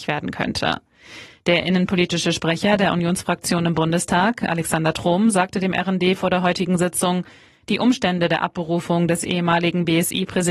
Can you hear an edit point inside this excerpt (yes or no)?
no